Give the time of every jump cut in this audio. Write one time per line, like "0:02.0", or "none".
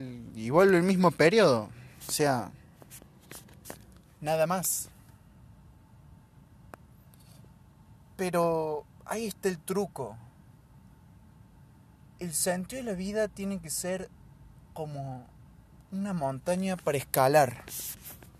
none